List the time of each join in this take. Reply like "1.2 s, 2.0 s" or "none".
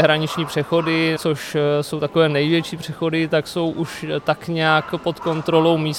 1.2 s